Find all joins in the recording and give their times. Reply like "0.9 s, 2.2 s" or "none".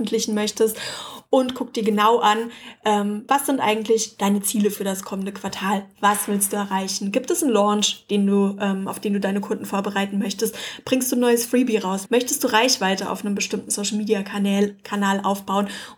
3.3 s, 12.1 s

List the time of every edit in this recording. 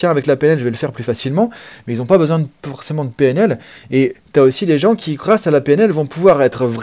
none

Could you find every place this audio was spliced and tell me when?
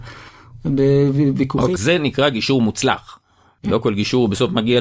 1.8 s

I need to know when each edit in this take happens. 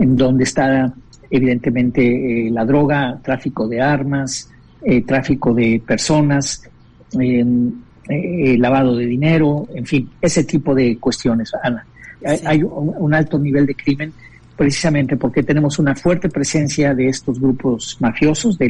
12.2 s

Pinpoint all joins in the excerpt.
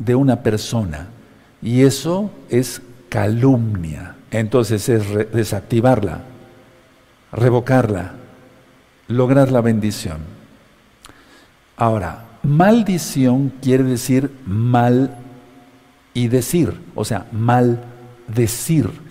4.3 s

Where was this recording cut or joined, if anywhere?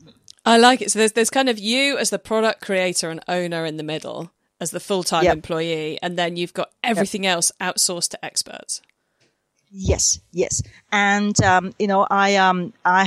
none

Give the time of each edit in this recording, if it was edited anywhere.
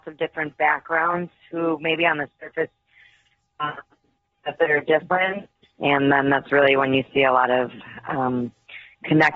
5.6 s

